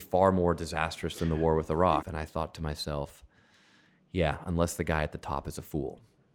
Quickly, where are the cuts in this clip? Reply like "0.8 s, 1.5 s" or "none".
2.0 s